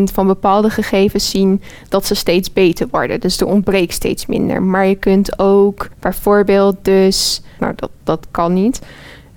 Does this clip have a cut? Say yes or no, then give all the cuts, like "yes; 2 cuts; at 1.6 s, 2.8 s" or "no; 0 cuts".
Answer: yes; 1 cut; at 7.6 s